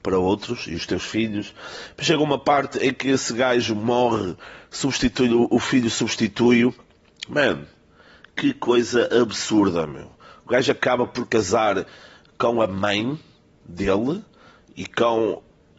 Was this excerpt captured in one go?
yes; 0 cuts

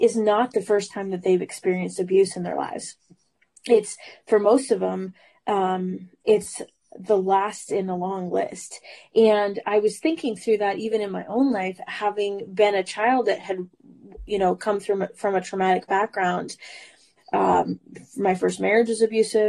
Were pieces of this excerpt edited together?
yes; 1 cut; at 17.2 s

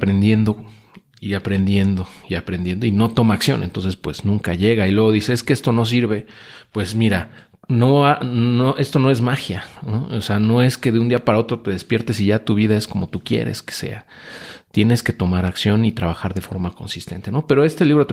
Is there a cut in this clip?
no; 0 cuts

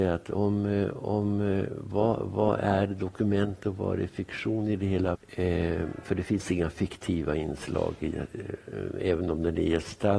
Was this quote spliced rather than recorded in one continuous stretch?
yes; 1 cut; at 5.1 s

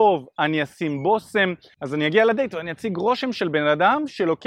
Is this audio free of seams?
yes; 0 cuts

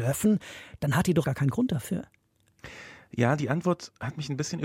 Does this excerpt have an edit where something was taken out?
yes; 1 cut; at 1.2 s

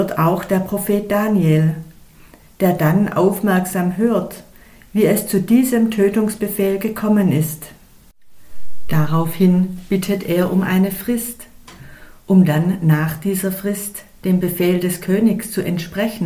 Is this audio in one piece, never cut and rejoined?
yes; 0 cuts

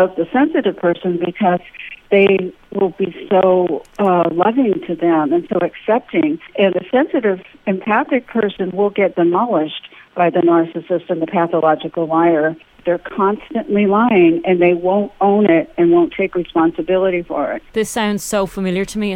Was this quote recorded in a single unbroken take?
yes; 0 cuts

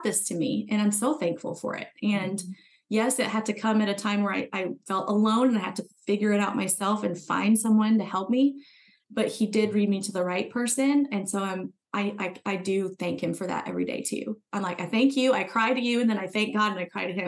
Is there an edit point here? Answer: no; 0 cuts

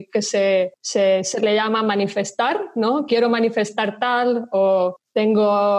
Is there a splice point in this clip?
no; 0 cuts

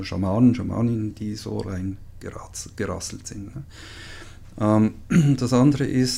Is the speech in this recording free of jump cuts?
yes; 0 cuts

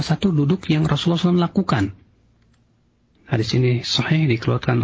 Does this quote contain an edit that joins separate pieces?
yes; 1 cut; at 3.1 s

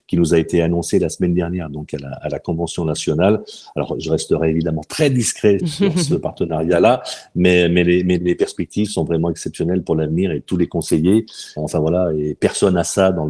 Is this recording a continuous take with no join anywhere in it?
no; 3 cuts; at 5.6 s, 8.2 s, 11.6 s

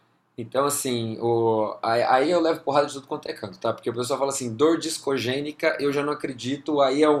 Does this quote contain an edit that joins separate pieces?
no; 0 cuts

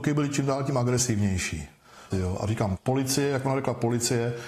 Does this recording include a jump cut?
yes; 1 cut; at 2.1 s

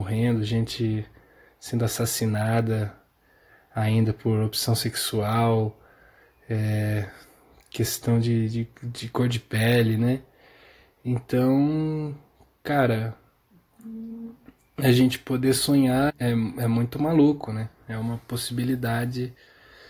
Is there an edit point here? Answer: yes; 1 cut; at 16.1 s

